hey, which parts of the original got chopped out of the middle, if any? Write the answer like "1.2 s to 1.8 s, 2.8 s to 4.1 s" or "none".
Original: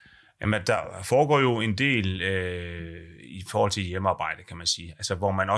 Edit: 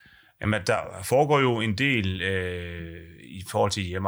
none